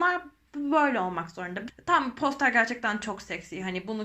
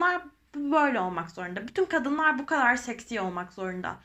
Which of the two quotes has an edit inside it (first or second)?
first